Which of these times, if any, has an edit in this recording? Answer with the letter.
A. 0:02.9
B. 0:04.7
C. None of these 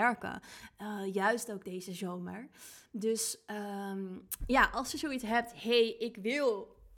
C